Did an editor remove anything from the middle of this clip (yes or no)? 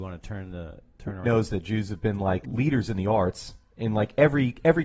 yes